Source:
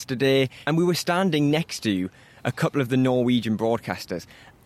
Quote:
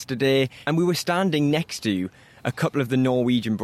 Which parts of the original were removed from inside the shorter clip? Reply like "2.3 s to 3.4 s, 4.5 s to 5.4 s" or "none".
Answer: none